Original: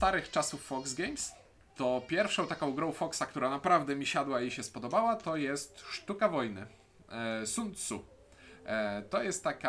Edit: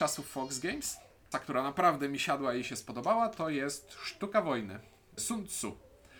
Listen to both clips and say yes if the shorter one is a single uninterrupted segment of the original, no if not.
no